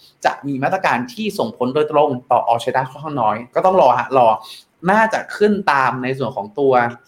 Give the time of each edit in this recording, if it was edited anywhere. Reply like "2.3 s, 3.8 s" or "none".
none

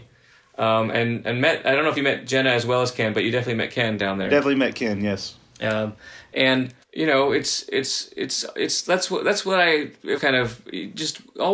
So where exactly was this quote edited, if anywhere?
6.8 s, 10.2 s

